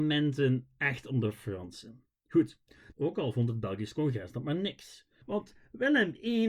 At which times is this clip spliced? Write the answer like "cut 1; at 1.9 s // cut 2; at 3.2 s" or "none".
cut 1; at 2.9 s // cut 2; at 5.2 s